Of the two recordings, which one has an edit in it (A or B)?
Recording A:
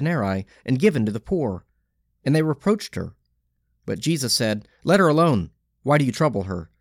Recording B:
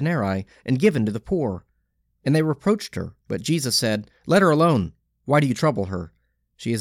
B